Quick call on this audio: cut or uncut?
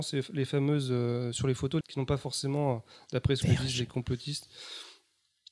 cut